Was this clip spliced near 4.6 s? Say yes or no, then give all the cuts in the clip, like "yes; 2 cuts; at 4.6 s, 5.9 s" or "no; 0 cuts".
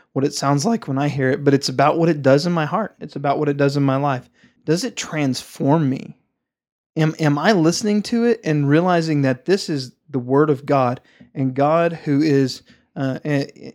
yes; 1 cut; at 4.6 s